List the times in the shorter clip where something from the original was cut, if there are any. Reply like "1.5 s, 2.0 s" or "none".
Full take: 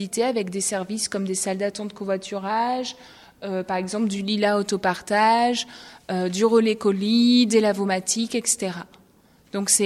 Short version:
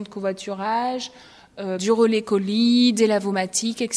1.8 s